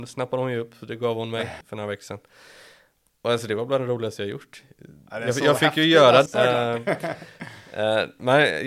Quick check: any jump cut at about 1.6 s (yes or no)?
yes